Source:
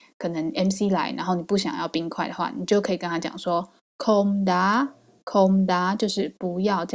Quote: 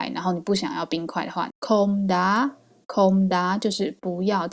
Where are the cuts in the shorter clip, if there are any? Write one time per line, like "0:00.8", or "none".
0:01.5